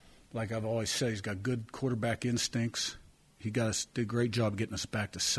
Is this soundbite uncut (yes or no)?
yes